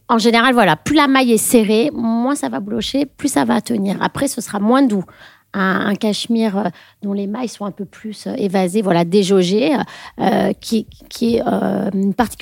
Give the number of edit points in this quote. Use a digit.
0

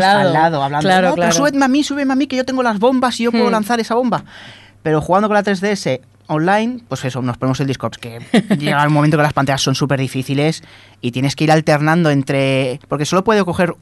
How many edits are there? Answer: 1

